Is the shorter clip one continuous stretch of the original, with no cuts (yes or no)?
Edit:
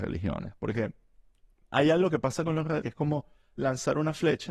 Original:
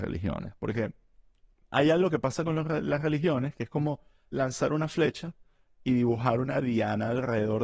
no